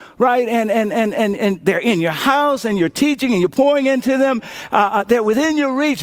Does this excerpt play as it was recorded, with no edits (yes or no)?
yes